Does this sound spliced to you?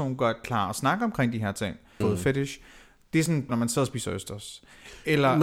yes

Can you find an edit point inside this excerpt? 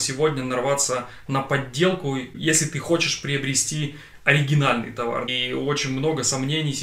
no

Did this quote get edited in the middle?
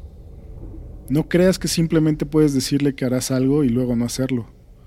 no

